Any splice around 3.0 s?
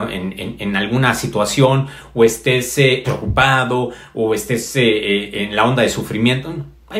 yes; 1 cut; at 3.0 s

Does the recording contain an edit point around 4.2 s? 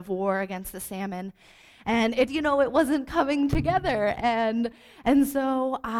no; 1 cut; at 2.3 s

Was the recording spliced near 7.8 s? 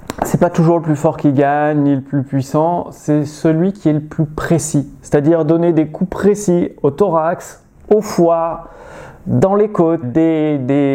no; 1 cut; at 10.0 s

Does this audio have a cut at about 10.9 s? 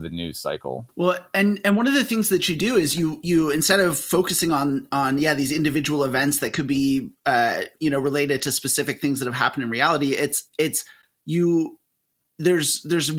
no; 1 cut; at 7.7 s

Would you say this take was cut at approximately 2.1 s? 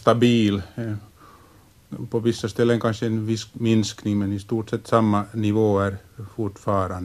no; 0 cuts

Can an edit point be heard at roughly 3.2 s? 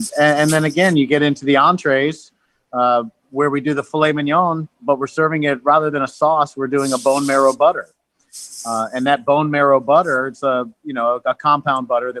yes; 1 cut; at 3.2 s

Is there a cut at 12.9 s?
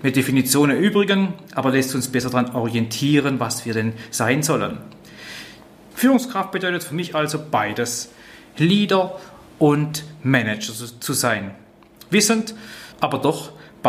yes; 2 cuts; at 5.9 s, 12.9 s

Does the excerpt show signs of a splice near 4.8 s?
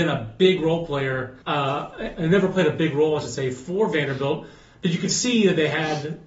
no; 1 cut; at 1.4 s

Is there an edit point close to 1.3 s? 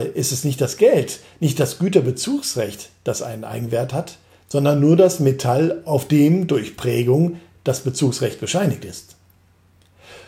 no; 0 cuts

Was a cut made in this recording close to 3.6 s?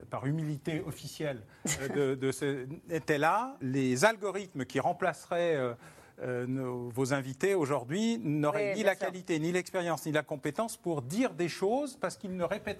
yes; 1 cut; at 3.6 s

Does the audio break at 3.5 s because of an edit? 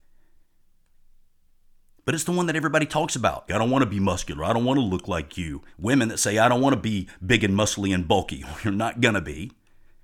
yes; 2 cuts; at 3.5 s, 5.7 s

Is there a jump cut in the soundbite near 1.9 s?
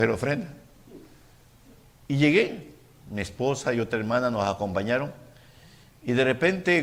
yes; 1 cut; at 1.9 s

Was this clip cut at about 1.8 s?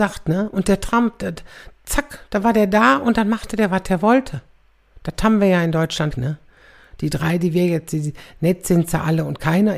no; 1 cut; at 6.1 s

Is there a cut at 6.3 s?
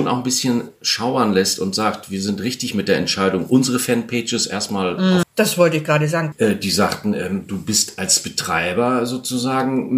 yes; 2 cuts; at 5.2 s, 6.3 s

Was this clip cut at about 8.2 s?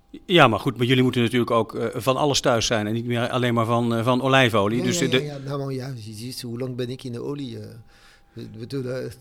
no; 0 cuts

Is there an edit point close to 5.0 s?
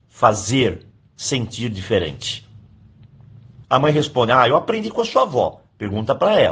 no; 1 cut; at 3.6 s

